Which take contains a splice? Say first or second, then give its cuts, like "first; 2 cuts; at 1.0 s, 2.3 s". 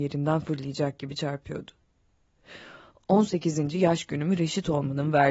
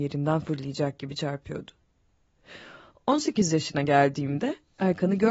first; 1 cut; at 3.0 s